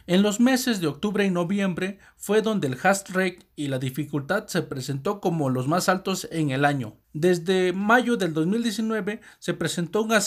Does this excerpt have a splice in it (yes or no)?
no